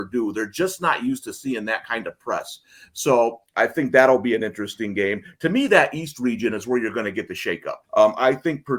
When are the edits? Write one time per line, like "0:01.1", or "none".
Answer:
0:07.8